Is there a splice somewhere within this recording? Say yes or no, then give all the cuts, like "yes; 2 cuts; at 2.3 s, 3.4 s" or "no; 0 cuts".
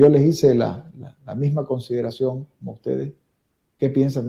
no; 0 cuts